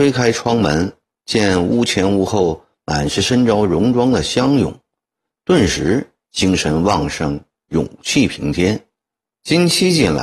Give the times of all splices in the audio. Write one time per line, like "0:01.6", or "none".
0:09.3